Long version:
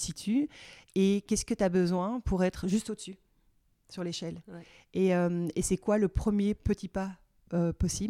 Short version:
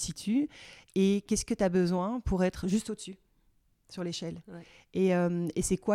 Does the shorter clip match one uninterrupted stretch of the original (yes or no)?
yes